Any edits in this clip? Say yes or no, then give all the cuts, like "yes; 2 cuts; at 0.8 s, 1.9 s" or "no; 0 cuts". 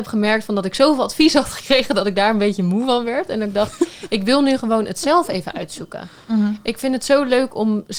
no; 0 cuts